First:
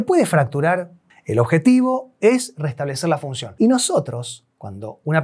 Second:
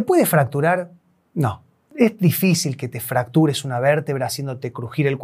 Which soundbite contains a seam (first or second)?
first